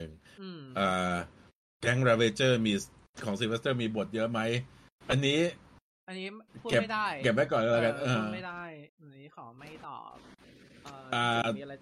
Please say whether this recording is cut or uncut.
cut